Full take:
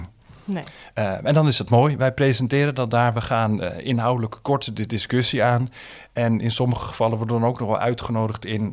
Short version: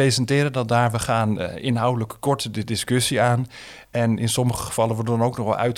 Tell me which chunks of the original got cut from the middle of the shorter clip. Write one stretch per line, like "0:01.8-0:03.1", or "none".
none